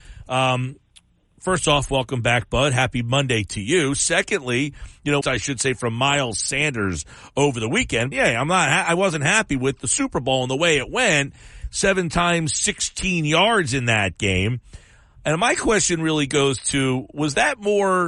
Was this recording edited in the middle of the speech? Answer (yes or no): yes